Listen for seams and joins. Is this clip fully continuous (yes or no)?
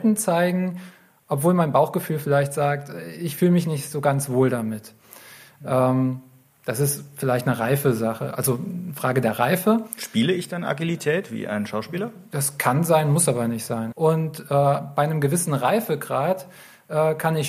no